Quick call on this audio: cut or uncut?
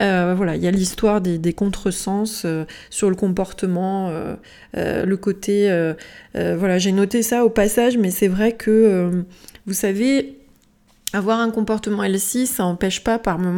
uncut